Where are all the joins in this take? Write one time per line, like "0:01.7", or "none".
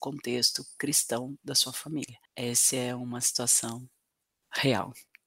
0:02.3